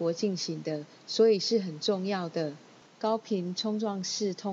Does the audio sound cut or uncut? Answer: cut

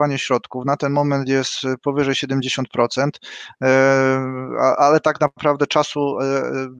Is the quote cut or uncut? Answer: uncut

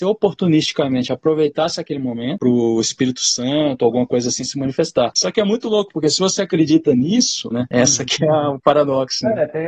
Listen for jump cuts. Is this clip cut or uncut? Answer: cut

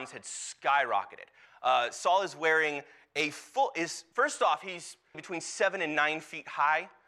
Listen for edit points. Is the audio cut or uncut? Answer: cut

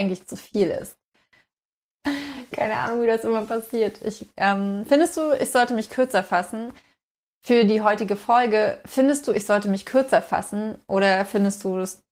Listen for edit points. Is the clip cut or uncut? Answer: cut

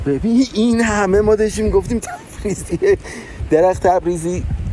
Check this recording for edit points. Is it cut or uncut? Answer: cut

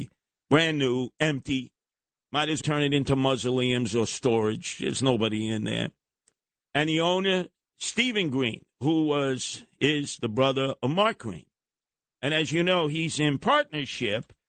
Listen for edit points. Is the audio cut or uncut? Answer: cut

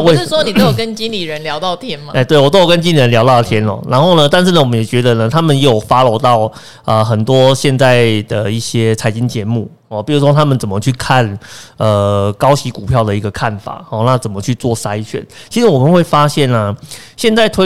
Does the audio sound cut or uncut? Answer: uncut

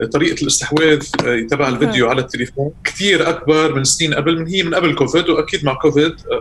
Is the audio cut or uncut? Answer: cut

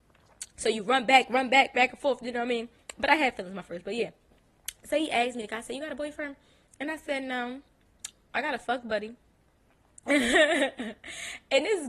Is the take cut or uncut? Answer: uncut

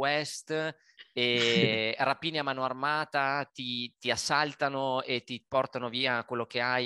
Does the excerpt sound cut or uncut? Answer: uncut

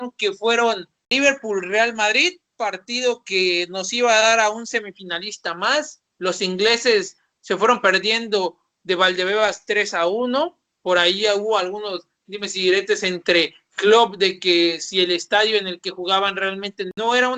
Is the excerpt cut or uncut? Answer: uncut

